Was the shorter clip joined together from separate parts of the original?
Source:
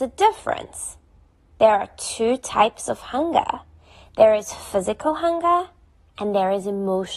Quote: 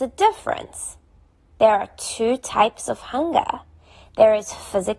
no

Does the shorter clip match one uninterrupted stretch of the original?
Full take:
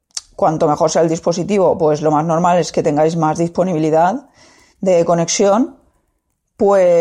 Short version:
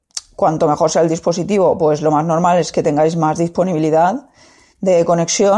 yes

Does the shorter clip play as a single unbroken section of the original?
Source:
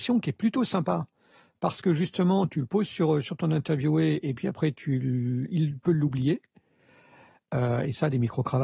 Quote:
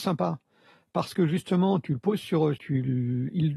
no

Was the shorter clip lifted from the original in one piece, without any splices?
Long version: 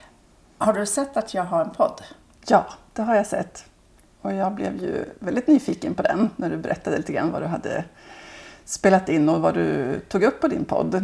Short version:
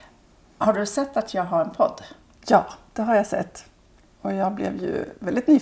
yes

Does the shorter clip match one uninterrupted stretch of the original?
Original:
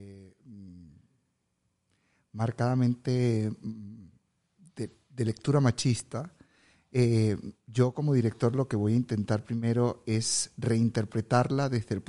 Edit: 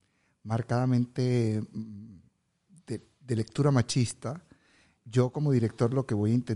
no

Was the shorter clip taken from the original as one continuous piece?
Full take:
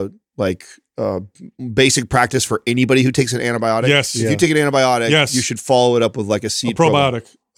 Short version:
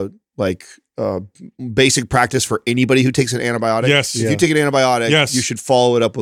yes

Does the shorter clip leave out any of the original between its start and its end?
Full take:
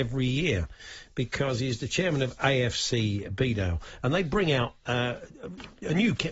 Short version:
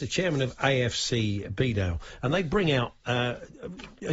no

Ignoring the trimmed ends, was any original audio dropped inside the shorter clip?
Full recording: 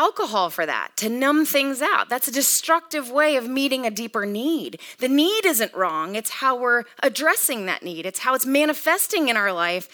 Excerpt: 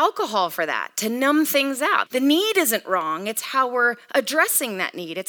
yes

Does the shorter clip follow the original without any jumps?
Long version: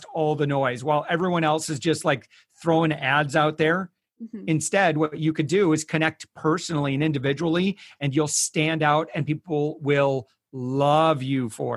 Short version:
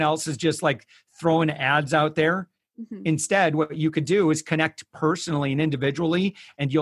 yes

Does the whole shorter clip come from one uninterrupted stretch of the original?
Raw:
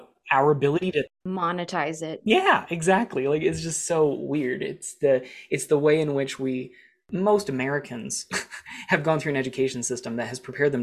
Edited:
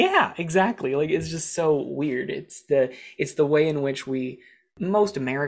yes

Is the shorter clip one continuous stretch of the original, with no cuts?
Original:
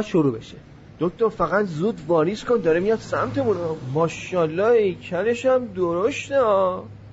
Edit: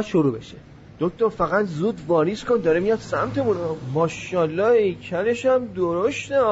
yes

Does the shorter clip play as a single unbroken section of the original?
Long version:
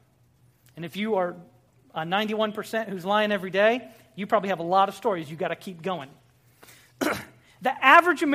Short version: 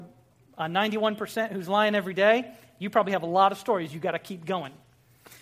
yes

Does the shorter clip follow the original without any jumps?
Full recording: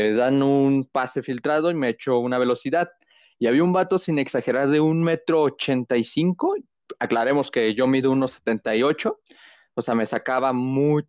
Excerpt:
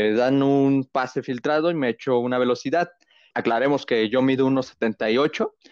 no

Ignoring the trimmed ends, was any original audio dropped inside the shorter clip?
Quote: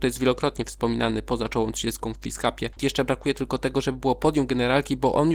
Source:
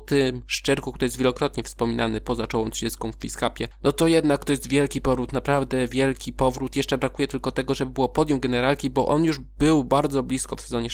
yes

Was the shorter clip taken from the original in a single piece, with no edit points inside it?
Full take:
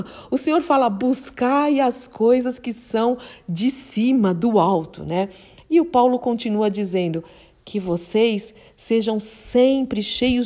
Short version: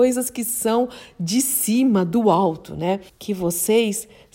no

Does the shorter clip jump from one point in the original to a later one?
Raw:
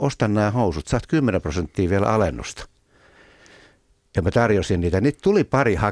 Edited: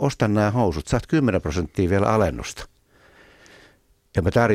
no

